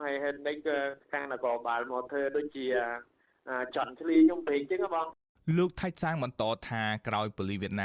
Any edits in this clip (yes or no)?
yes